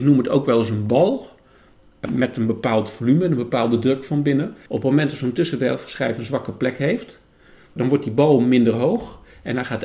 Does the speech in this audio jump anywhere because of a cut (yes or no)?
yes